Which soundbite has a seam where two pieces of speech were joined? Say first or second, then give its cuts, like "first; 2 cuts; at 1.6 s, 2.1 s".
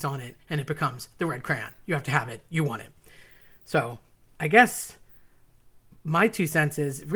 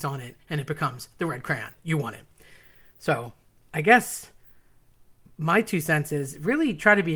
second; 1 cut; at 1.8 s